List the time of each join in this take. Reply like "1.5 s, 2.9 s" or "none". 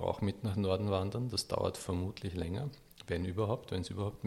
none